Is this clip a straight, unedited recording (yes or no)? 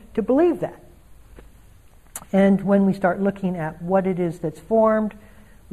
yes